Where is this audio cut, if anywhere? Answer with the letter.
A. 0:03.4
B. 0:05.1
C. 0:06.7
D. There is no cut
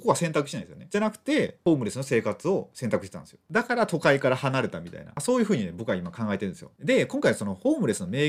A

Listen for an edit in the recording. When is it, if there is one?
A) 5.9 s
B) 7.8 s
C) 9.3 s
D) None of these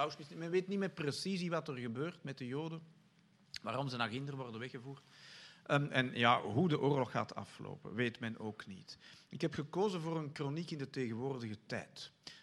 D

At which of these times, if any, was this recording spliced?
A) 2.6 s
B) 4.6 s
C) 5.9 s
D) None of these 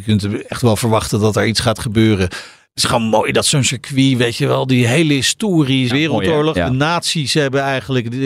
C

